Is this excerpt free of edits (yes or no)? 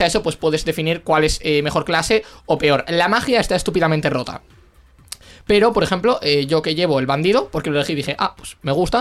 yes